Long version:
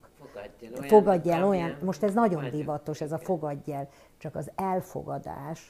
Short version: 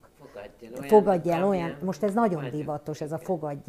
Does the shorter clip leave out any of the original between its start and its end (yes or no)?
no